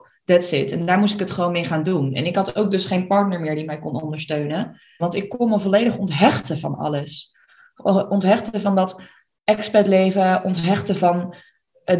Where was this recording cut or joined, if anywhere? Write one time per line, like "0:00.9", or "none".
0:05.0